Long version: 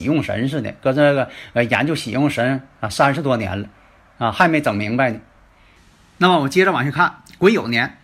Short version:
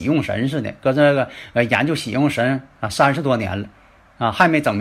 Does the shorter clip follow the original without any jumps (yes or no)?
yes